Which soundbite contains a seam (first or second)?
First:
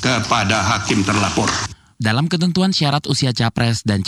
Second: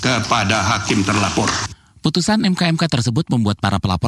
first